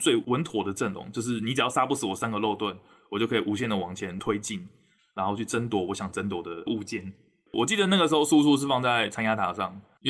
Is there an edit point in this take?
yes; 1 cut; at 7.5 s

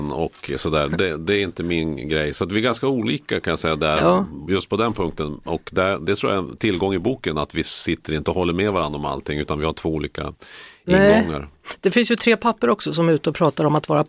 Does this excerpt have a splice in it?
no; 0 cuts

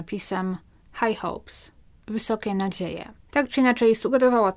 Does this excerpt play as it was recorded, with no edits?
no; 1 cut; at 3.2 s

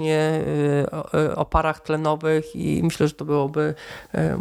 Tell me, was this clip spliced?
no; 0 cuts

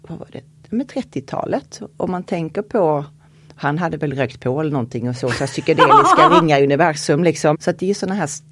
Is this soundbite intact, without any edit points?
no; 1 cut; at 7.5 s

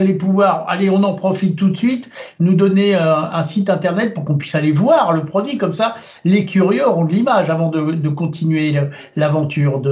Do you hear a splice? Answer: no; 0 cuts

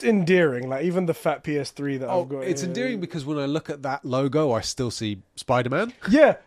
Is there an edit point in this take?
no; 0 cuts

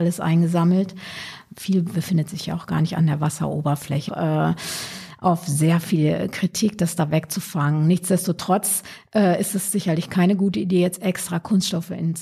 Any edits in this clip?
yes; 1 cut; at 4.1 s

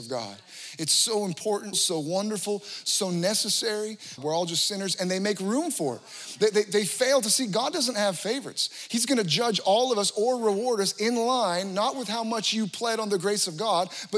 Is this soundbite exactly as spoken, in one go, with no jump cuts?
no; 2 cuts; at 1.7 s, 4.2 s

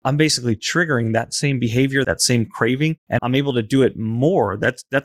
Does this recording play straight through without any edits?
no; 2 cuts; at 2.0 s, 3.2 s

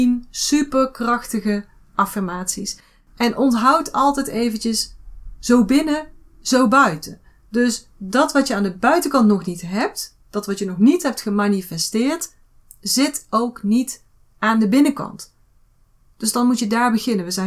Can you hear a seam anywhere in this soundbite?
no; 0 cuts

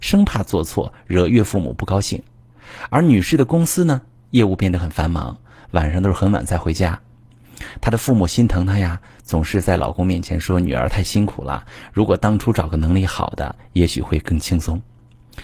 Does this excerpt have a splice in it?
no; 0 cuts

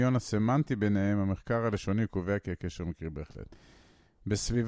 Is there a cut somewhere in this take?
no; 0 cuts

